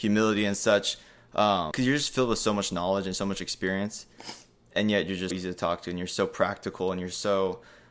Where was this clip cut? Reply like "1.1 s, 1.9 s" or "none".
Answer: 1.7 s, 5.3 s